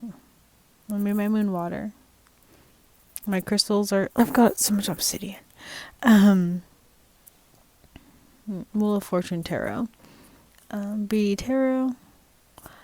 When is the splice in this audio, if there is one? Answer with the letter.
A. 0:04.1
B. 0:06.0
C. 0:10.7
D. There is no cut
A